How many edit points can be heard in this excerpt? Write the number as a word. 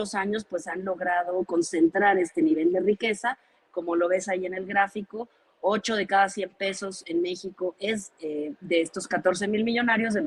zero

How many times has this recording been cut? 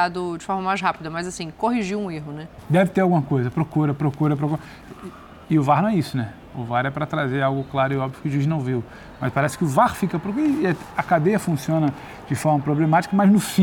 one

